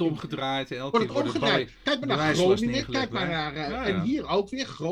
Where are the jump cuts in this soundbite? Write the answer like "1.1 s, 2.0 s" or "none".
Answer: none